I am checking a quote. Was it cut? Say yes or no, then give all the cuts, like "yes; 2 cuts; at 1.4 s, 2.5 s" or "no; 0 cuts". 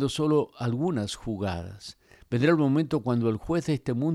no; 0 cuts